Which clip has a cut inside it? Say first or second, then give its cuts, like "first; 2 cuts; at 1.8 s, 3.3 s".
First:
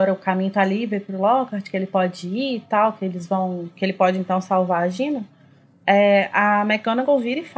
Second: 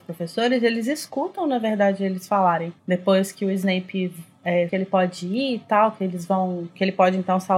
second; 2 cuts; at 2.8 s, 4.7 s